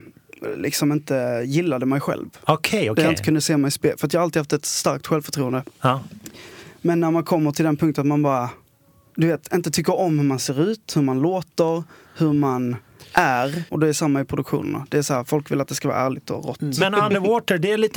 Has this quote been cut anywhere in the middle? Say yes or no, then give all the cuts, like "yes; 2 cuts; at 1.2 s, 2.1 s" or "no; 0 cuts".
yes; 1 cut; at 13.7 s